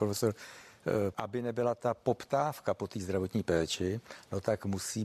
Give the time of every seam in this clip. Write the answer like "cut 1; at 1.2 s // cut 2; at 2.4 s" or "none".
cut 1; at 1.1 s